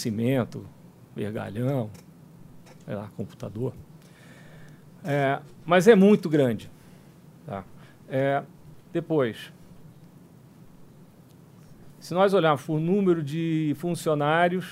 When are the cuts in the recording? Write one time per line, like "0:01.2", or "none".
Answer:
none